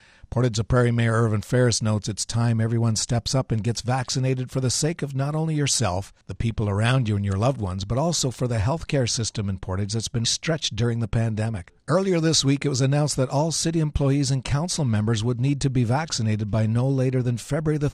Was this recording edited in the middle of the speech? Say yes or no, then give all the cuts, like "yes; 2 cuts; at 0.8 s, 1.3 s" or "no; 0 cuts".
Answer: yes; 2 cuts; at 10.2 s, 11.7 s